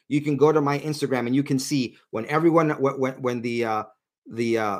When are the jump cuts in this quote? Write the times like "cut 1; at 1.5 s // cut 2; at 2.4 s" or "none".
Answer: none